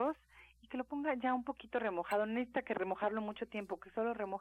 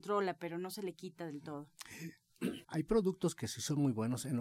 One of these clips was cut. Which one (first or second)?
second